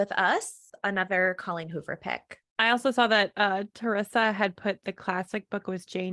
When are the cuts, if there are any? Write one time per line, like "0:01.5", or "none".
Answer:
0:02.4